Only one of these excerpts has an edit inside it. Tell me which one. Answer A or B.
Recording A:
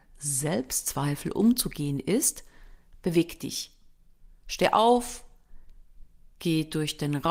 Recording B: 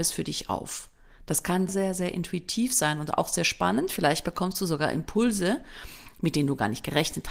B